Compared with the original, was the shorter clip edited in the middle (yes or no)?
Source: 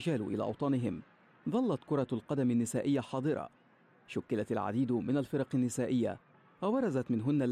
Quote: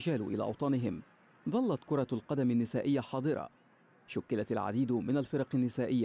no